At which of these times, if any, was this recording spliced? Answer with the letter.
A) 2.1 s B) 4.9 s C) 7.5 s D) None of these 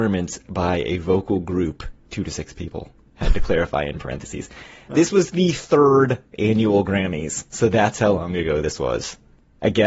A